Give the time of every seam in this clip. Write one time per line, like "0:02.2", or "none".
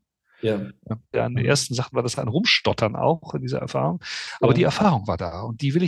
0:01.1